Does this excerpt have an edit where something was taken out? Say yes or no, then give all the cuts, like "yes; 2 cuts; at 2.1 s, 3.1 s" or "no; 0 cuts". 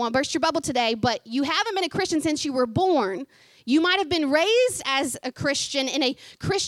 no; 0 cuts